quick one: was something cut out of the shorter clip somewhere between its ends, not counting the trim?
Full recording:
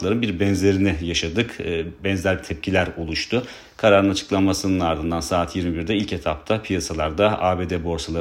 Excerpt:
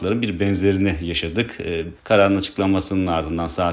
yes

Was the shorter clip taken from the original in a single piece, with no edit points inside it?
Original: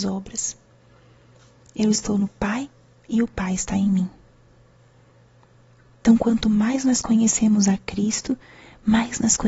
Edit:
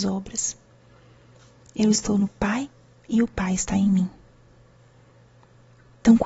yes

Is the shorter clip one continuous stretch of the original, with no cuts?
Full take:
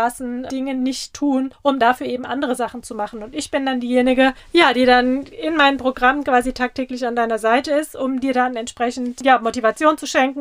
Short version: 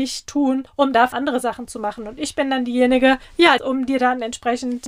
no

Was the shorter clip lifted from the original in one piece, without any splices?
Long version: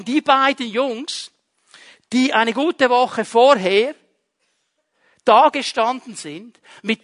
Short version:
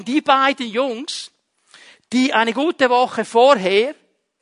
yes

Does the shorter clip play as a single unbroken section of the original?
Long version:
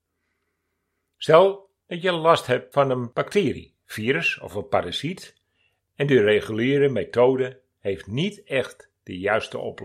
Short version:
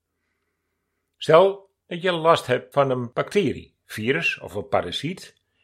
yes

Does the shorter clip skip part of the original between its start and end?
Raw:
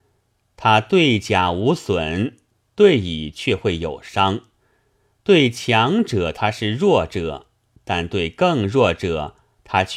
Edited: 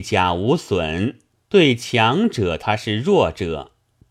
yes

